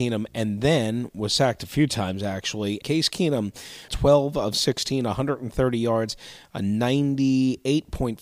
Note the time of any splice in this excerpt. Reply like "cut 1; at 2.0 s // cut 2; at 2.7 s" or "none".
cut 1; at 2.8 s // cut 2; at 3.9 s